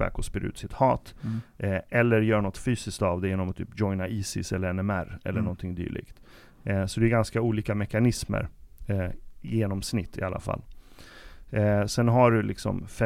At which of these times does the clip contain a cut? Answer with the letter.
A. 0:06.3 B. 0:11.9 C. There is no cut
B